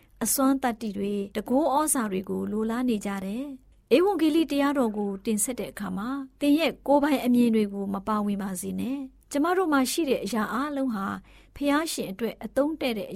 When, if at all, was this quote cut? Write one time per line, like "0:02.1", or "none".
0:01.3